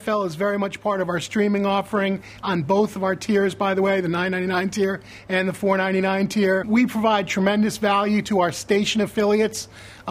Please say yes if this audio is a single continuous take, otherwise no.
yes